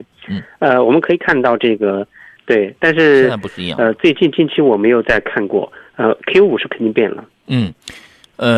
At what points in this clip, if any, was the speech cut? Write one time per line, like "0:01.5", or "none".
0:02.4